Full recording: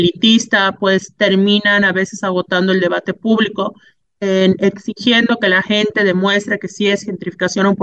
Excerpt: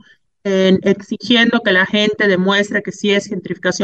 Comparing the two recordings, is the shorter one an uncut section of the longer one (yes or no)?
yes